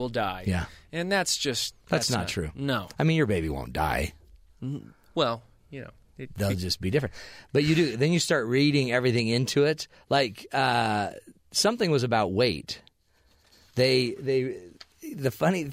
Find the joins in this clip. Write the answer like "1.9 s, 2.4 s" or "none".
none